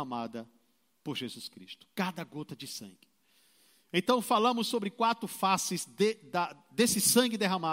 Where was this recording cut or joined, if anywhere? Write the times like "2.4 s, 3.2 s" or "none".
none

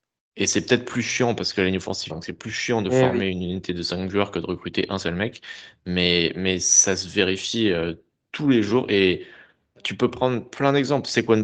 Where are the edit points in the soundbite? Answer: 2.1 s

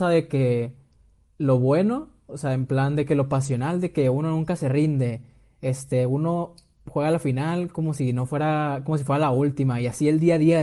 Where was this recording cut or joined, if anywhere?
none

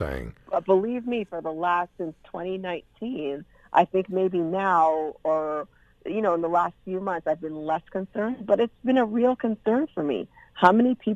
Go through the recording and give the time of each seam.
none

